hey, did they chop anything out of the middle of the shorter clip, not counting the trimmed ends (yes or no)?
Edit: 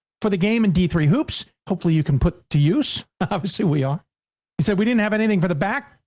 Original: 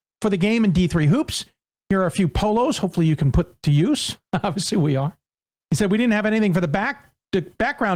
yes